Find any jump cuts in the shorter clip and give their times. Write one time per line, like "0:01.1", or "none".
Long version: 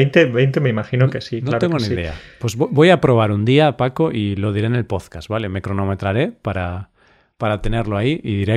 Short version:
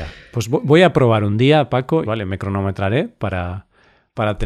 0:02.0